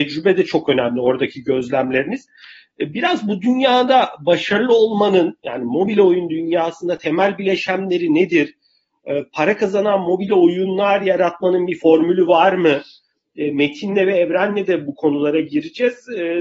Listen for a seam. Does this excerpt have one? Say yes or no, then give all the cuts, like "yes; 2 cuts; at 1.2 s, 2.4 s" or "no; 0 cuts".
no; 0 cuts